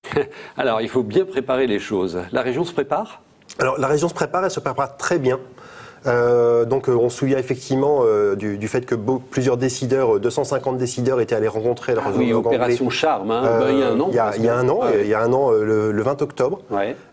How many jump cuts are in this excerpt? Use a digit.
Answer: 0